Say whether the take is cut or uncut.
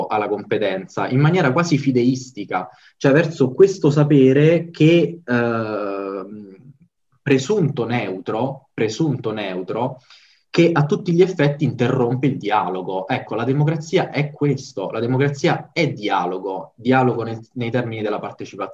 uncut